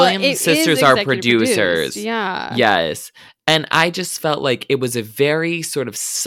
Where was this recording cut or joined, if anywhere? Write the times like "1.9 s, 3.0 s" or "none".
none